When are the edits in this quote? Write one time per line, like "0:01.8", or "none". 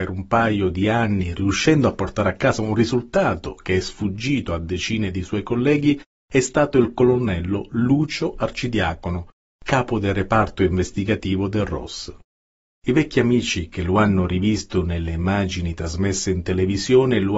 0:12.7